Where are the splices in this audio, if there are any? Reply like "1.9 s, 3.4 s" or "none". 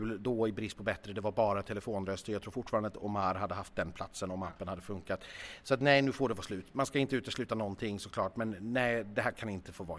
none

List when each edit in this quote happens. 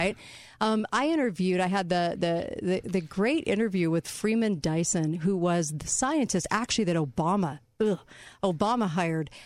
none

